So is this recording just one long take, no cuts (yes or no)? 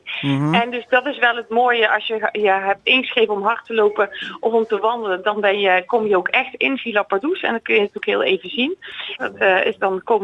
no